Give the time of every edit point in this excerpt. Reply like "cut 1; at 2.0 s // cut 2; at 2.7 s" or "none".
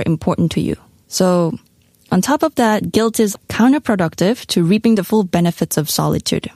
cut 1; at 1.0 s // cut 2; at 3.4 s